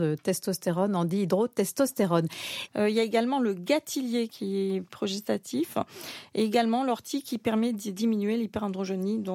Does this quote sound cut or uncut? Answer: cut